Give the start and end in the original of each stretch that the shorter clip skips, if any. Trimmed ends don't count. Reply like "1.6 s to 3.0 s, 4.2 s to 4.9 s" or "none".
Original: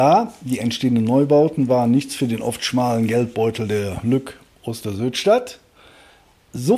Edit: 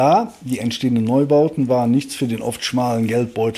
none